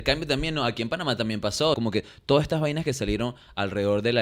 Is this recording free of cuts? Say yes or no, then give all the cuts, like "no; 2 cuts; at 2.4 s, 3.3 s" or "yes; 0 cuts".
no; 1 cut; at 1.7 s